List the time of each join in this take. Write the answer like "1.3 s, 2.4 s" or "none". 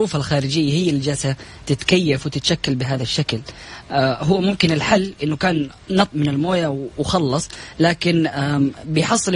6.1 s